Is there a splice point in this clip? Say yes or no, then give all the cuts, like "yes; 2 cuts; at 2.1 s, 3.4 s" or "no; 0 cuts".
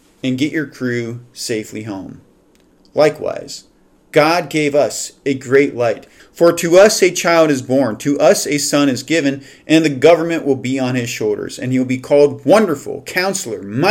yes; 1 cut; at 6.2 s